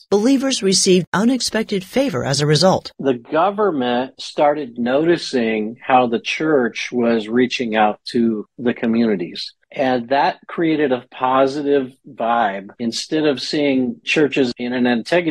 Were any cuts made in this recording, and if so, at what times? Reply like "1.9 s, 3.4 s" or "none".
9.6 s